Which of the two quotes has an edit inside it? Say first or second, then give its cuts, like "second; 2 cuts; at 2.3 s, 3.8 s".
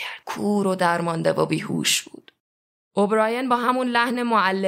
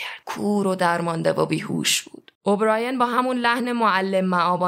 second; 1 cut; at 2.4 s